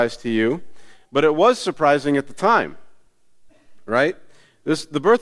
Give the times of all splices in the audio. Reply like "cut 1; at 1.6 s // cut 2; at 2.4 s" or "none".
none